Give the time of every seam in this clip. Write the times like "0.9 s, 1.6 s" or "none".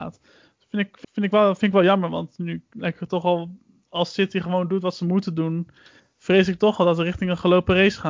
1.0 s

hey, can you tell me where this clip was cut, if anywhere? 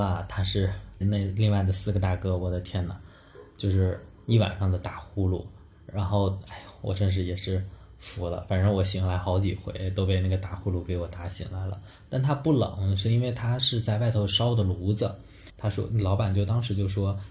1.0 s

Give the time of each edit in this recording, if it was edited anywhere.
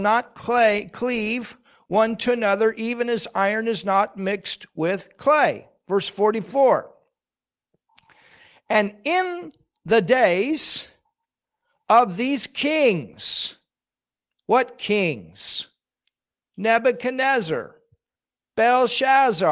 none

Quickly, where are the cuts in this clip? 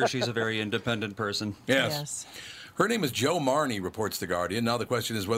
none

